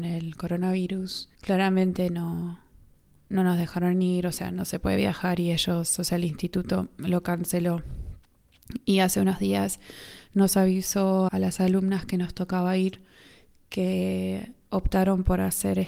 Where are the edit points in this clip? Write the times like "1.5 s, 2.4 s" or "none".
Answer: 1.3 s, 11.3 s